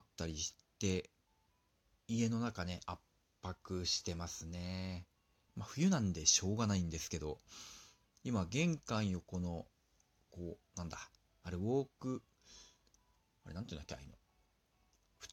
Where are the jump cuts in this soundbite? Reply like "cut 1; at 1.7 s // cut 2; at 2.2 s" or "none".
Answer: cut 1; at 5.5 s